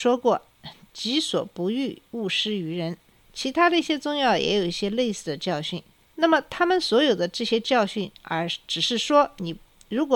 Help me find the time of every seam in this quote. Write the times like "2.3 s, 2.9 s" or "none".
none

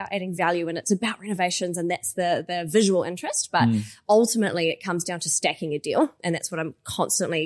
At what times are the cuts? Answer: none

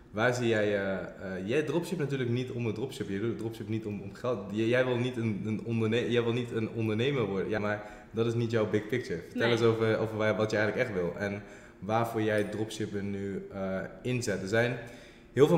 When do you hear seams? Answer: 7.6 s

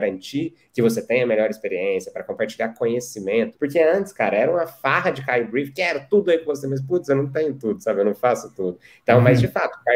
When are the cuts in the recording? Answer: 3.5 s

